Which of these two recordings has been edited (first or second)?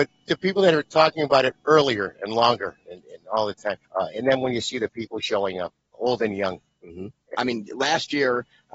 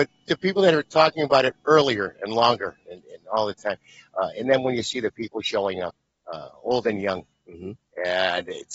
first